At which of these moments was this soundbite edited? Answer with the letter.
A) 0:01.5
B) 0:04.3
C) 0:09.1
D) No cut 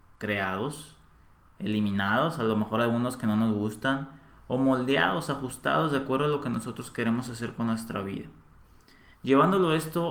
C